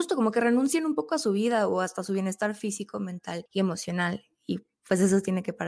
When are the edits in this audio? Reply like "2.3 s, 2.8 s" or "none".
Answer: none